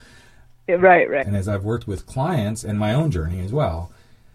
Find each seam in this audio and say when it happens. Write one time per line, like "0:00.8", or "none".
0:01.2